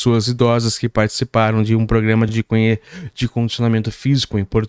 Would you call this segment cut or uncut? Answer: uncut